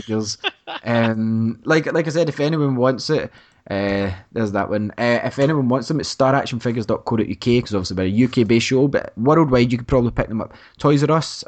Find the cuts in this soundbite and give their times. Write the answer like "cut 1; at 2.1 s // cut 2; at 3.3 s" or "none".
none